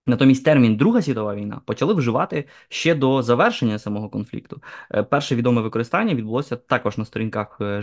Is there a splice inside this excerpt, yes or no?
no